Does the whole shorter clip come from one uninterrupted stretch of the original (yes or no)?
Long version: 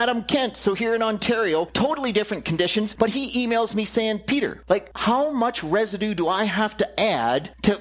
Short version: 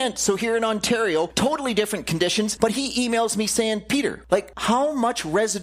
yes